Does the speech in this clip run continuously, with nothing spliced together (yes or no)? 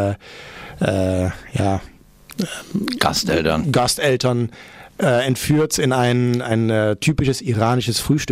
yes